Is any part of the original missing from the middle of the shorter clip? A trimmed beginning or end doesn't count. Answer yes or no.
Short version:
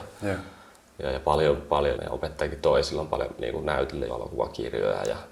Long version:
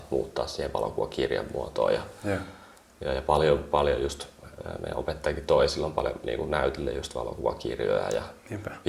yes